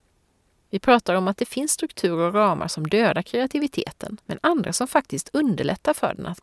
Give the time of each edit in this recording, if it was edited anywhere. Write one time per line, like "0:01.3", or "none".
0:04.2